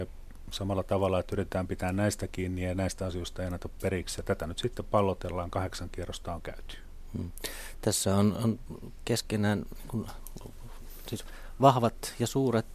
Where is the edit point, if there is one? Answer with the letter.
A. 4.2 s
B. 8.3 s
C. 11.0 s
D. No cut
D